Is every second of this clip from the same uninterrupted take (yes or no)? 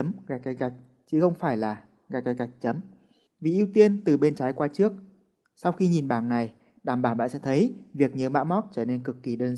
no